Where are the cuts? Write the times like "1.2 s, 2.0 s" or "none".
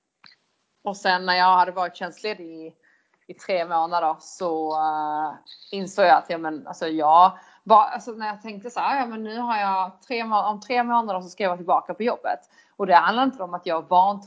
none